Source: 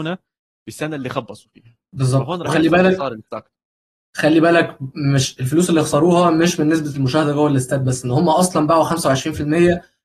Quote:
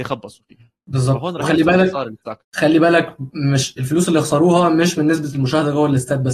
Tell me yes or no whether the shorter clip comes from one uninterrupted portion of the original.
no